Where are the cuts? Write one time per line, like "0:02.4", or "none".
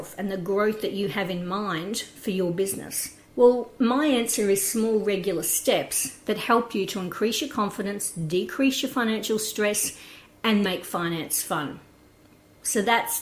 0:03.3
0:10.6